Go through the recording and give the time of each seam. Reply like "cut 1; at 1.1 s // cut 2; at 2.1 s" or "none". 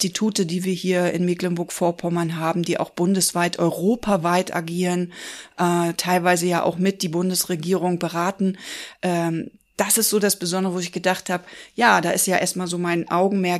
none